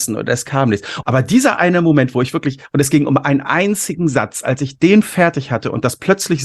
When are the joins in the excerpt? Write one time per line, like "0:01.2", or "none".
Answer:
0:01.0